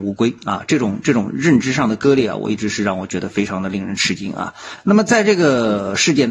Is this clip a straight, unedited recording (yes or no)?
yes